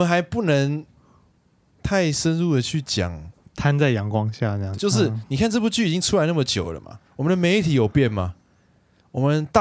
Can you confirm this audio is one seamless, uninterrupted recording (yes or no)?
no